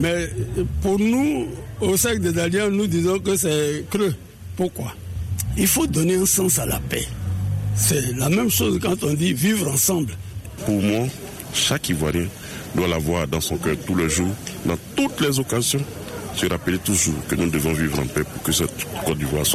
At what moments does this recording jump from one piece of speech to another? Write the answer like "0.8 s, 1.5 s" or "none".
10.6 s